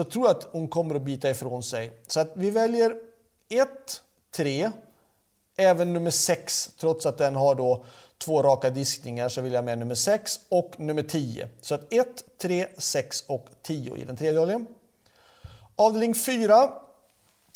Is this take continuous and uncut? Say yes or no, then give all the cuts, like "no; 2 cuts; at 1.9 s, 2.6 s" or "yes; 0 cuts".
yes; 0 cuts